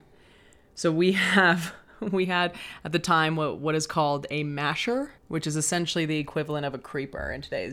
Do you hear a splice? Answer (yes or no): yes